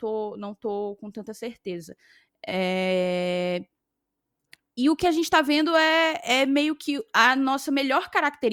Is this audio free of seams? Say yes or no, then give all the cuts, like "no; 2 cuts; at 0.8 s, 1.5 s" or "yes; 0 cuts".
yes; 0 cuts